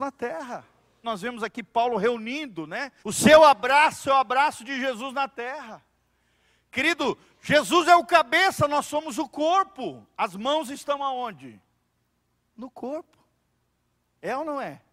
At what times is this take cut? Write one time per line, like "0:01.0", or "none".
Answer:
0:01.0
0:03.0